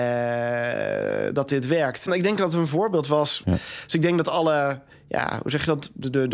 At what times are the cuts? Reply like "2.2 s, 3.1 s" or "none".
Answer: 2.1 s, 3.4 s